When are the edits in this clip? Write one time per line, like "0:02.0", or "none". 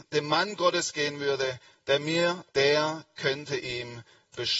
0:02.5